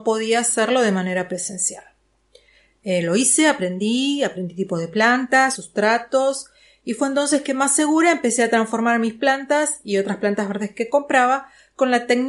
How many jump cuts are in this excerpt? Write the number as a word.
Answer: one